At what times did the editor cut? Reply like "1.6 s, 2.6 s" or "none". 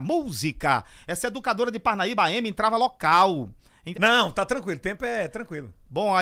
3.9 s